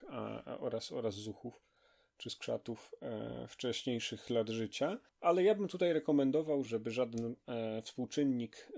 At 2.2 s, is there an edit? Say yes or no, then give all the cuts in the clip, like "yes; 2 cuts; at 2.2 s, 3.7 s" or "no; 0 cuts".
no; 2 cuts; at 5.1 s, 6.7 s